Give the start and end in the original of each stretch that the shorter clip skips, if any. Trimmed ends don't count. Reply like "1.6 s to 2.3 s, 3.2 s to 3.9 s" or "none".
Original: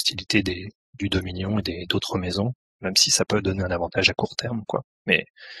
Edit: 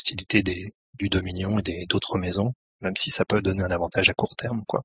none